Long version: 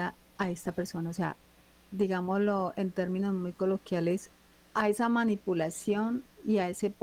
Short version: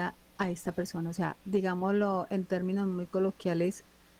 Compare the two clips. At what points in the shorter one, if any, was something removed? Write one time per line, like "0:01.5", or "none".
0:01.4